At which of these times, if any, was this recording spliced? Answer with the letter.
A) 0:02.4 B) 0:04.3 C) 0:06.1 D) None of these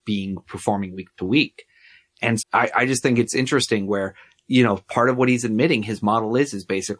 A